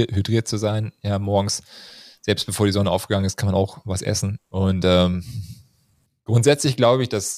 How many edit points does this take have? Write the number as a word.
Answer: one